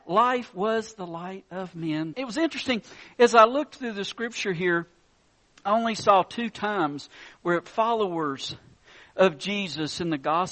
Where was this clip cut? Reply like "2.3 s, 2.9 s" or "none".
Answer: 2.1 s